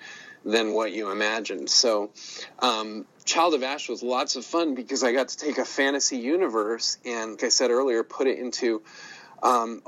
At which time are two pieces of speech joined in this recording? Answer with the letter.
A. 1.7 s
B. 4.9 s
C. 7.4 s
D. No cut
C